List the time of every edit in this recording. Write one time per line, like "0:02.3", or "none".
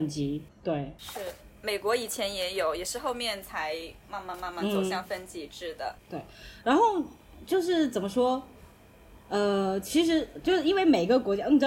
none